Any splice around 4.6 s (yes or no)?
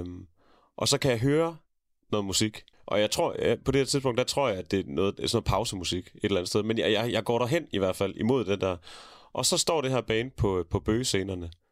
no